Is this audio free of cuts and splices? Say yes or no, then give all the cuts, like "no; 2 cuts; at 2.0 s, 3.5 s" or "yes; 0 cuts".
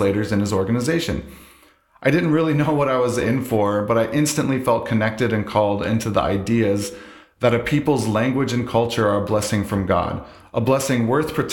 yes; 0 cuts